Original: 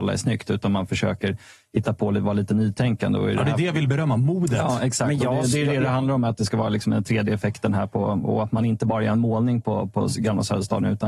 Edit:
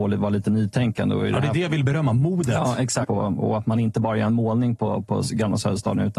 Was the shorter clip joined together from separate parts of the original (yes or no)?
yes